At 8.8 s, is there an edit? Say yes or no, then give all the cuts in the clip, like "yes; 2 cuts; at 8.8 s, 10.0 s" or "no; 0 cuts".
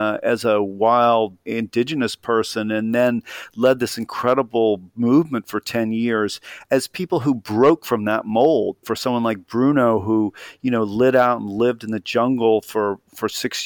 yes; 1 cut; at 8.8 s